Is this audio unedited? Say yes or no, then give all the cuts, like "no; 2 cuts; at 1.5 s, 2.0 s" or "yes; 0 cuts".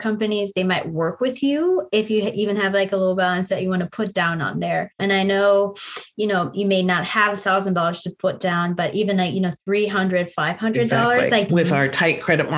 no; 2 cuts; at 5.0 s, 11.5 s